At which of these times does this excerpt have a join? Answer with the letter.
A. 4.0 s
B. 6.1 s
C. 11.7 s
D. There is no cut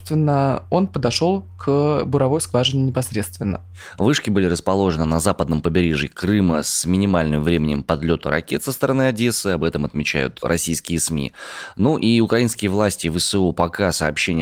A